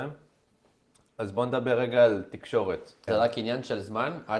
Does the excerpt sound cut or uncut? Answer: cut